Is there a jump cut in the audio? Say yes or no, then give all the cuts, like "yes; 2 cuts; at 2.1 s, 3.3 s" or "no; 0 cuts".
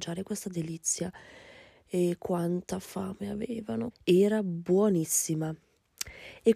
yes; 1 cut; at 3.9 s